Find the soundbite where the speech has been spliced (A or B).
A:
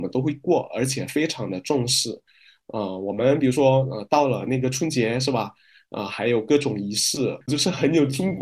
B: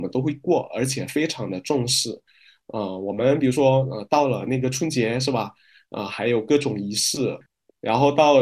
A